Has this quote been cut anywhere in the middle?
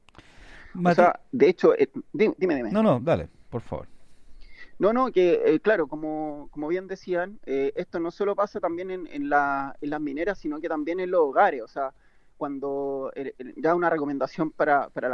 no; 0 cuts

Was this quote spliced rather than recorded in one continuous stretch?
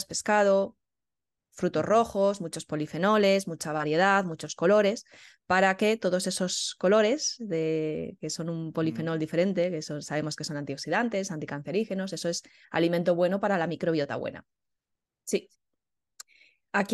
yes; 1 cut; at 15.1 s

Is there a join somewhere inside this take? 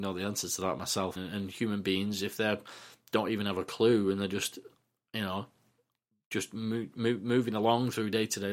yes; 1 cut; at 1.2 s

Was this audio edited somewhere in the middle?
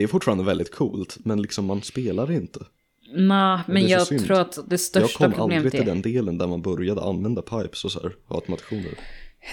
no; 0 cuts

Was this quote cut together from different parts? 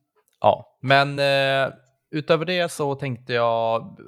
no; 0 cuts

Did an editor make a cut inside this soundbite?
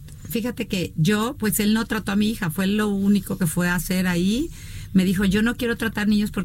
no; 0 cuts

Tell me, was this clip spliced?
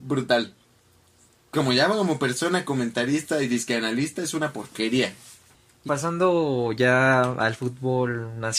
yes; 1 cut; at 5.9 s

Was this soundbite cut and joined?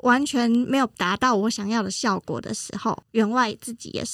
yes; 1 cut; at 3.0 s

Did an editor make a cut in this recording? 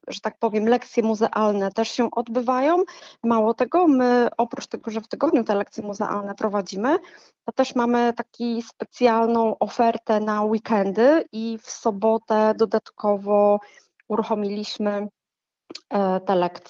no; 0 cuts

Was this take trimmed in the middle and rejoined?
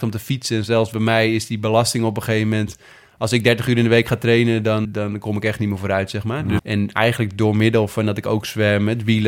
yes; 2 cuts; at 4.8 s, 6.6 s

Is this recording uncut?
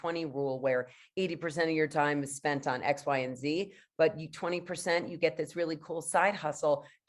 yes; 0 cuts

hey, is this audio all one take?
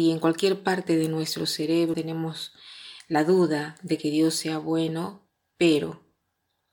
no; 1 cut; at 1.9 s

